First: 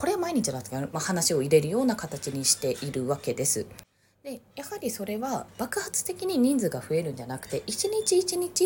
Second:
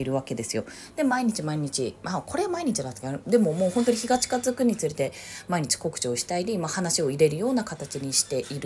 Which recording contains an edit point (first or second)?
first